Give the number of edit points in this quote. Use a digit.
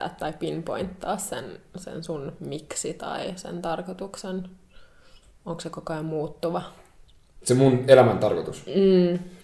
0